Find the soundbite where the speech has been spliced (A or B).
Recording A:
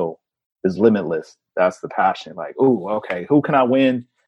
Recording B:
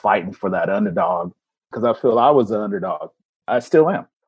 A